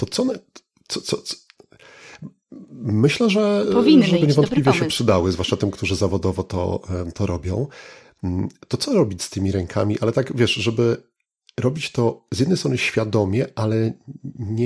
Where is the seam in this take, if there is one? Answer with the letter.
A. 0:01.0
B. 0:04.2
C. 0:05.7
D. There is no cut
B